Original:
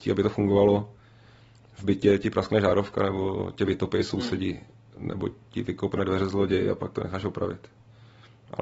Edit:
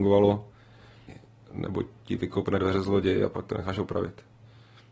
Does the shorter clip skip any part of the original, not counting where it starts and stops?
yes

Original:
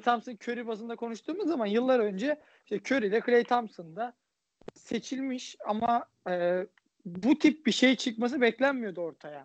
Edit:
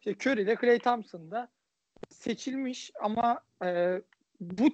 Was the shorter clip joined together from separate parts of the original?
no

